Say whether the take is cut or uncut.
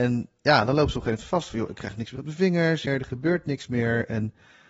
cut